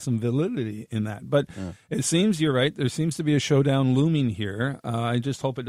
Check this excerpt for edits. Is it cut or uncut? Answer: uncut